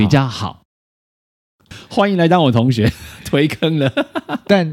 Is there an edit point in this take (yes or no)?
yes